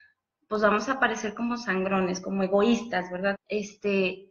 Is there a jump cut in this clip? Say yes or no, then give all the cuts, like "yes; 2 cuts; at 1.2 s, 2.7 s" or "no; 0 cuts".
yes; 1 cut; at 3.3 s